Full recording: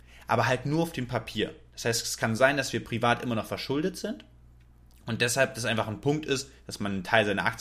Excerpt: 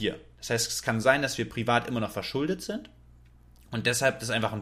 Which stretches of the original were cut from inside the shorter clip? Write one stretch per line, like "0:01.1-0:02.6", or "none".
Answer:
none